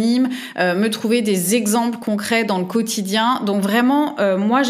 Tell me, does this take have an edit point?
no; 0 cuts

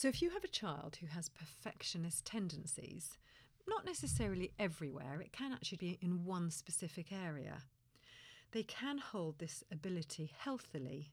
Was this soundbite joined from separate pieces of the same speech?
yes; 1 cut; at 5.8 s

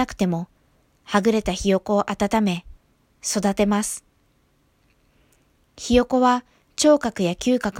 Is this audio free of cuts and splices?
yes; 0 cuts

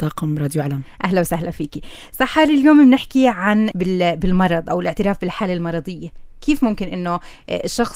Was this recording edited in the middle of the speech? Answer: yes; 1 cut; at 3.7 s

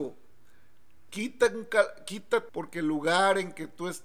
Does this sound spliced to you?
yes; 2 cuts; at 1.1 s, 2.5 s

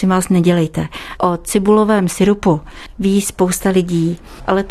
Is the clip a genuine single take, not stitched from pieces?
no; 1 cut; at 1.2 s

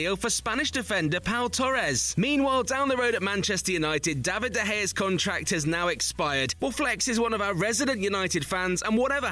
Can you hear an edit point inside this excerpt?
yes; 1 cut; at 6.6 s

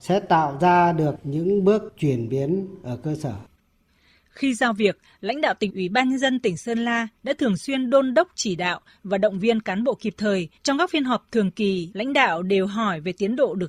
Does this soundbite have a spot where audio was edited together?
yes; 3 cuts; at 5.7 s, 10.6 s, 11.9 s

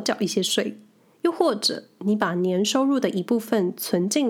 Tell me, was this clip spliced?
yes; 1 cut; at 1.1 s

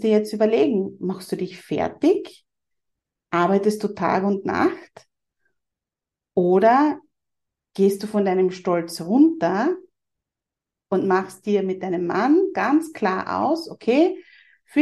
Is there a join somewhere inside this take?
no; 0 cuts

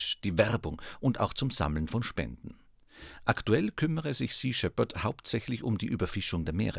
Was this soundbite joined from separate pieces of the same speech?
no; 0 cuts

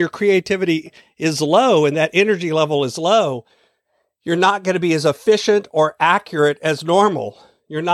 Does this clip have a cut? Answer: no; 0 cuts

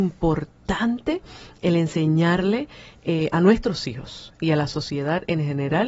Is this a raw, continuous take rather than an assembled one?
yes; 0 cuts

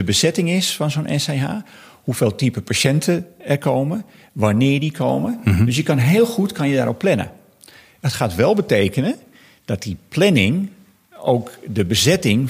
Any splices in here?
no; 0 cuts

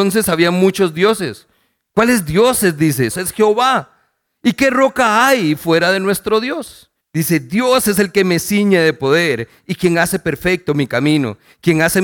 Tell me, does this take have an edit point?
yes; 2 cuts; at 3.1 s, 7.0 s

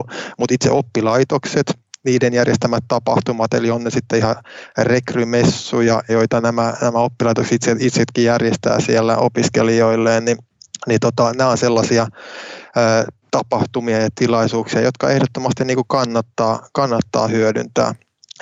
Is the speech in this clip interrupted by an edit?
yes; 1 cut; at 6.1 s

